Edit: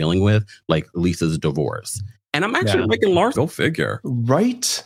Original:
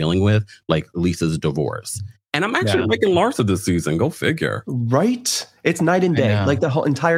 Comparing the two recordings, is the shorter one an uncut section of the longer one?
no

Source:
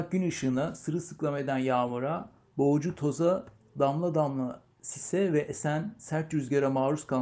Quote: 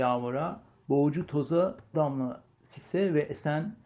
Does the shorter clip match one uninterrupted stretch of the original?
no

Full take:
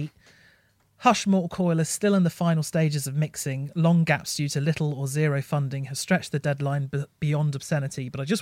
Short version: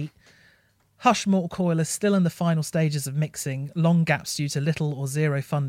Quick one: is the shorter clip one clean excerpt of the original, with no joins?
yes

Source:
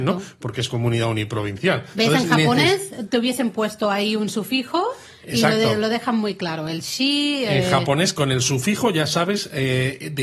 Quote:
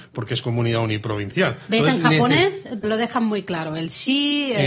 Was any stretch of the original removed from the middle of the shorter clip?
yes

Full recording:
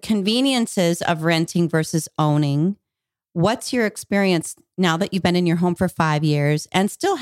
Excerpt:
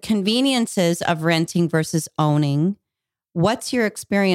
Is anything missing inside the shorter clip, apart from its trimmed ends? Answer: no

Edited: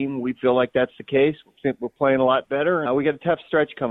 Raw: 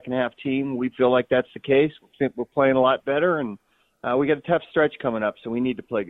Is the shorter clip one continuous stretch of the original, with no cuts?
no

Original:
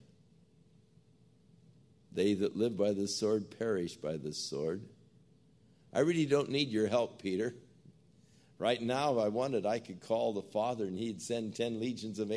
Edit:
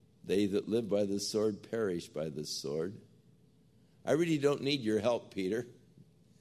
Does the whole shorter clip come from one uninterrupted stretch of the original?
yes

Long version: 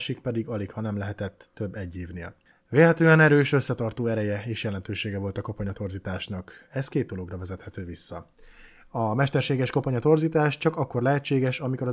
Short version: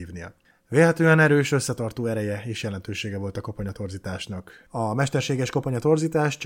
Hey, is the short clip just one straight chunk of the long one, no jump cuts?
no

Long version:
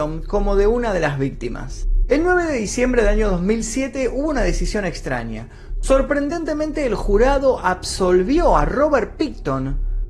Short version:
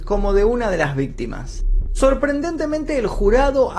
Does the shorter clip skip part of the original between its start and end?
yes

